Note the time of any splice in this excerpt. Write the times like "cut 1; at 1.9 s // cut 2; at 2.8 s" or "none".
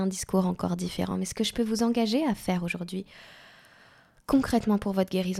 none